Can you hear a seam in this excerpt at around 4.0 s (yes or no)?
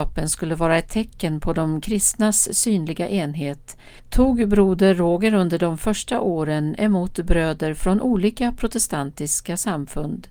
yes